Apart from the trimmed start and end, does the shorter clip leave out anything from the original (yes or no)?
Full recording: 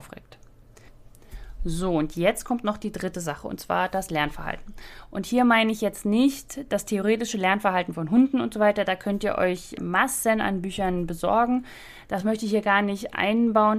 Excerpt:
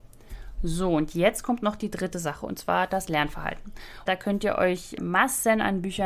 yes